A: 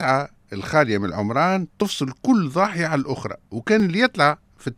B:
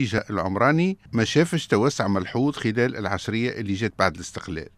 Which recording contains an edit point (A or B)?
B